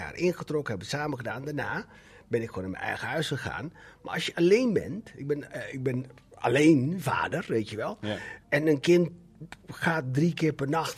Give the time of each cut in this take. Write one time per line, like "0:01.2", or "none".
0:08.4